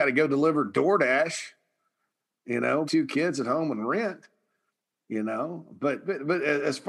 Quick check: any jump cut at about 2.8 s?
yes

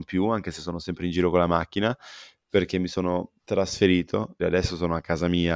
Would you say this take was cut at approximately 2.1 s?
no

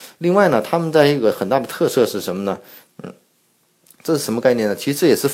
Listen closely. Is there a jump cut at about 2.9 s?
yes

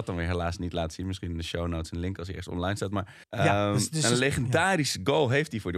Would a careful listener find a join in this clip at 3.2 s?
yes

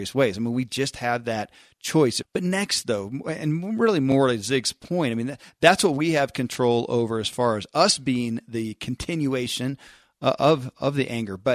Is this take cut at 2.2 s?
yes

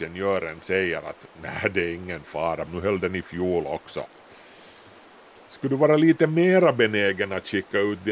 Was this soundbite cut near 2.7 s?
yes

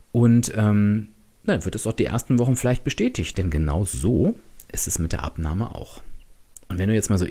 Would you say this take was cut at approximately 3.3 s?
yes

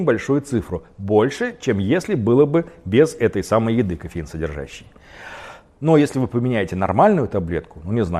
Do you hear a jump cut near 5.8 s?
yes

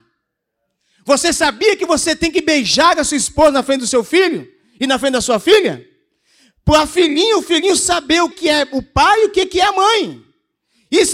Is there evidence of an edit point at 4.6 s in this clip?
no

